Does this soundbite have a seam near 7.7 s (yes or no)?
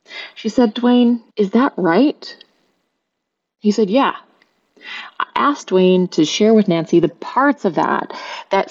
no